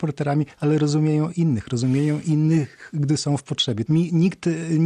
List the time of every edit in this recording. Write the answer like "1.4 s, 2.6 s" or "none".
3.9 s